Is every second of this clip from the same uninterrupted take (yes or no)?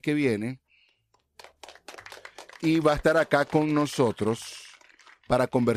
yes